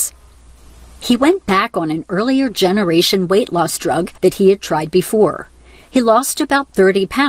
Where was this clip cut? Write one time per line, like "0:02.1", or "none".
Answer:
0:04.2